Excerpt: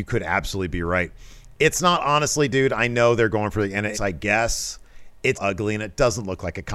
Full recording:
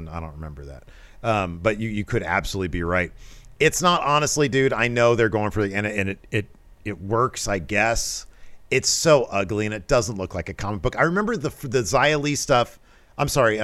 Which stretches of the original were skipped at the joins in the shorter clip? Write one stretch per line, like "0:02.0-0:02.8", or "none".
0:05.9-0:07.4
0:08.8-0:09.3